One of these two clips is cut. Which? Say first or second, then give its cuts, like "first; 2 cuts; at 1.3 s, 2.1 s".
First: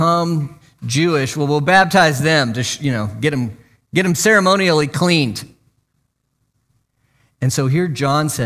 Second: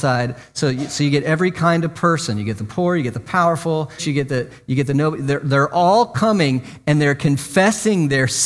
second; 1 cut; at 4.0 s